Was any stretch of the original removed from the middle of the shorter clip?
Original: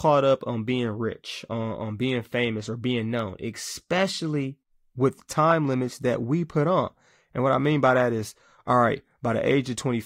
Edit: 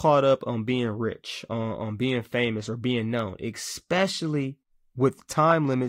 no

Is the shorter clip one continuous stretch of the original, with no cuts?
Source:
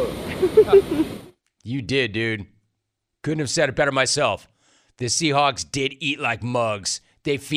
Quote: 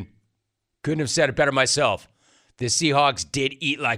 yes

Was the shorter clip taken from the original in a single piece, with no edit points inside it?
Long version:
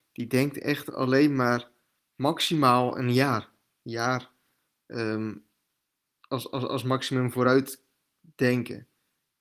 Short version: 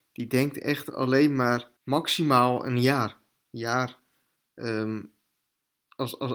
no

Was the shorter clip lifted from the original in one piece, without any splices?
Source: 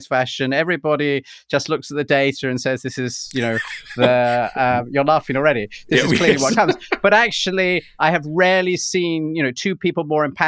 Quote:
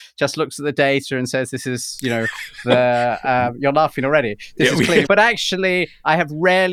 no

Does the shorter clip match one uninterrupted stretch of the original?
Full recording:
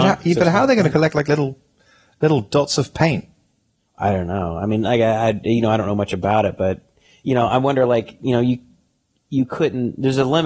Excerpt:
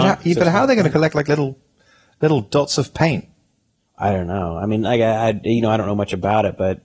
yes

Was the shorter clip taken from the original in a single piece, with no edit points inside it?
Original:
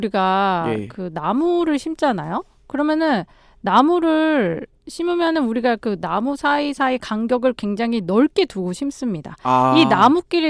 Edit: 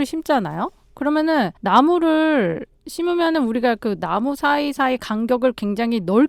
no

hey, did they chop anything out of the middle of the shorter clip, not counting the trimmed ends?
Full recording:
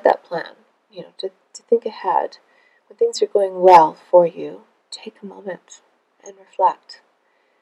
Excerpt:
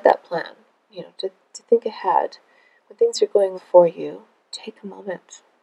yes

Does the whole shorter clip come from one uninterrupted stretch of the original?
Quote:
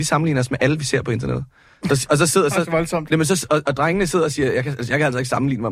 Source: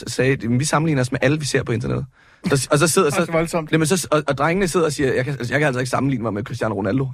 yes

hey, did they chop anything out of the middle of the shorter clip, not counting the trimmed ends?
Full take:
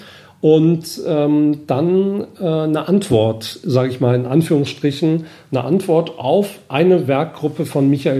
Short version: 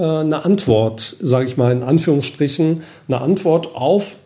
no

